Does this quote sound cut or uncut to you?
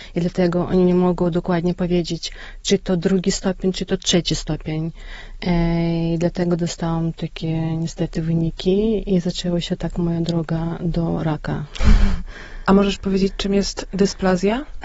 uncut